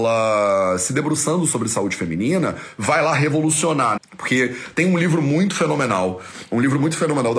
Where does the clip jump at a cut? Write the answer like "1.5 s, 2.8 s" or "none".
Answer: 4.0 s